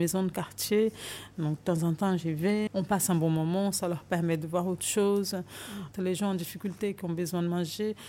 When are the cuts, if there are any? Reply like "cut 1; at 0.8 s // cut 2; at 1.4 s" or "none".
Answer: cut 1; at 2.7 s // cut 2; at 5.9 s

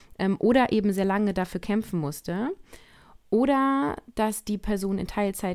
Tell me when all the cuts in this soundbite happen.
cut 1; at 3.2 s

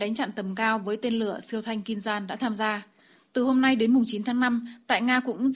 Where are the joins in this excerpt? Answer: none

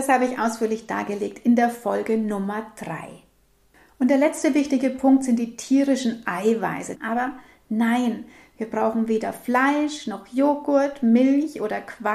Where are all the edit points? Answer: cut 1; at 6.9 s

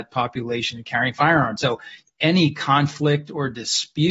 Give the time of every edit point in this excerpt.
none

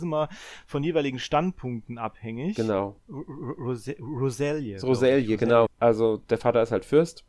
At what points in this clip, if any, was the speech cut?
cut 1; at 3.0 s // cut 2; at 5.7 s

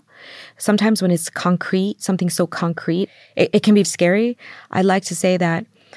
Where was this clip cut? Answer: cut 1; at 3.8 s

